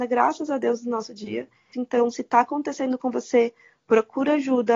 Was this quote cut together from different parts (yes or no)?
yes